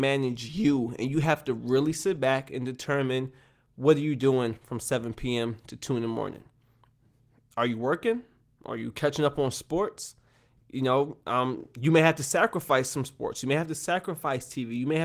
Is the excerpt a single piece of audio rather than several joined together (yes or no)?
no